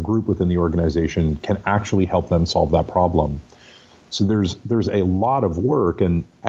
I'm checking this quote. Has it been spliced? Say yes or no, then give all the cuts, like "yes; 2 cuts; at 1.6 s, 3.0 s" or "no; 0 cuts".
no; 0 cuts